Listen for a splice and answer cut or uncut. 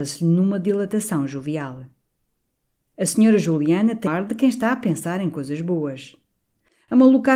cut